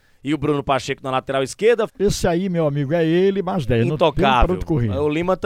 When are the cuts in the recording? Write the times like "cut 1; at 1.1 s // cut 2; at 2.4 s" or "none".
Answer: cut 1; at 1.9 s